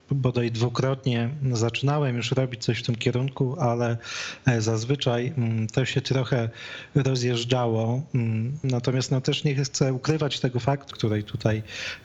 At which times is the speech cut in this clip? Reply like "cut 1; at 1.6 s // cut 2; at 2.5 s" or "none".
cut 1; at 8.6 s // cut 2; at 10.9 s